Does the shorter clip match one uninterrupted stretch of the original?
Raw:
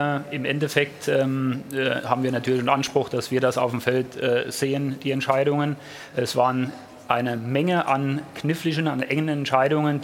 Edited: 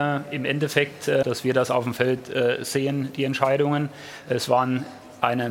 no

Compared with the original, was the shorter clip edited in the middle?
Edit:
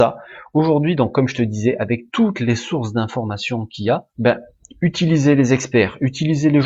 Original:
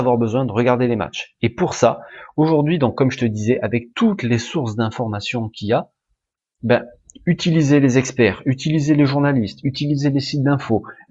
yes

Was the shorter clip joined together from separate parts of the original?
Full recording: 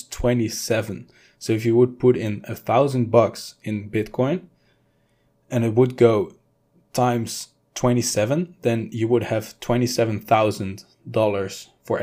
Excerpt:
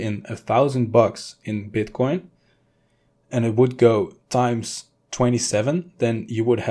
yes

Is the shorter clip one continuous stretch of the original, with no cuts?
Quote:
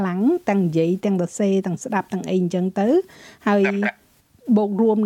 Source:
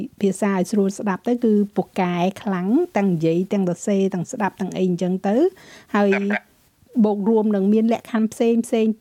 yes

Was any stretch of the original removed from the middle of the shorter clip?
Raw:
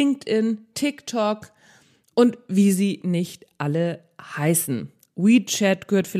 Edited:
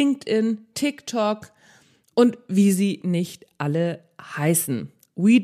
no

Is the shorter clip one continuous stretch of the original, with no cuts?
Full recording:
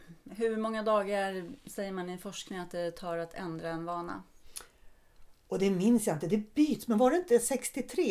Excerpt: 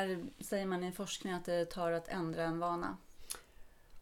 yes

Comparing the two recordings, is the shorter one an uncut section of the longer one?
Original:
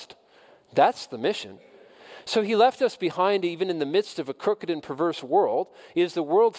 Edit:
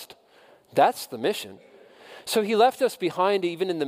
yes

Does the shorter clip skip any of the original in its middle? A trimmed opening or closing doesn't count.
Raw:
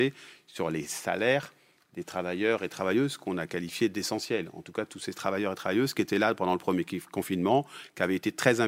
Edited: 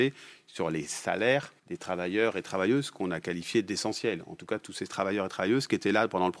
yes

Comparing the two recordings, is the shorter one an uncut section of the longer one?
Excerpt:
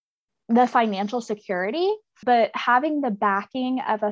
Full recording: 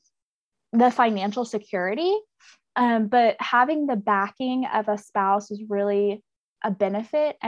no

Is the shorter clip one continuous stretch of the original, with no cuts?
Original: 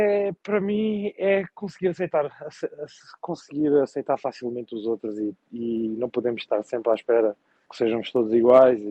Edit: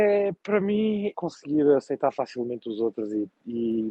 no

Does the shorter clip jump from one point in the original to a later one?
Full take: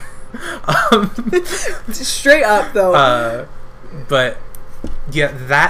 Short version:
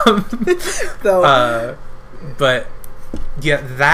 yes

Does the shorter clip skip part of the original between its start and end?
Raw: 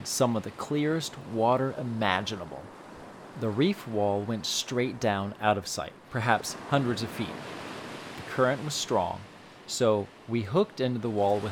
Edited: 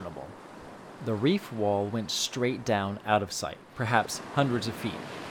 no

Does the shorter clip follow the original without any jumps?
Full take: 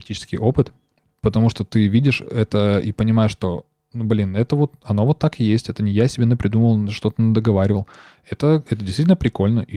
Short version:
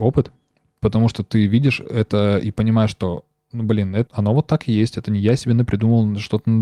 no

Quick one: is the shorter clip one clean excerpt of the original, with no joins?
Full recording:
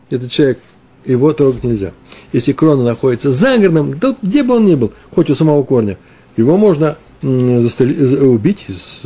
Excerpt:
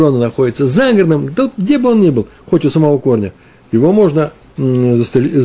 yes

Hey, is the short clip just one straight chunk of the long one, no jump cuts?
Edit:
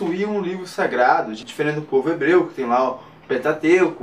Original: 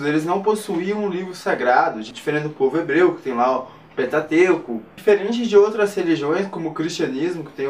yes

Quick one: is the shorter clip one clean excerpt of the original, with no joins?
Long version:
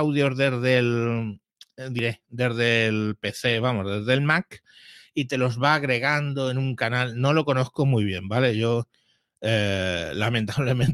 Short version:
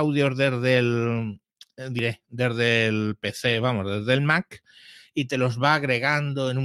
yes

